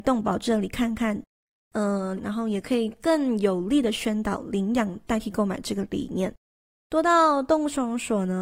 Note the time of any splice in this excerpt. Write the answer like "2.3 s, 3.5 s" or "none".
2.2 s, 6.7 s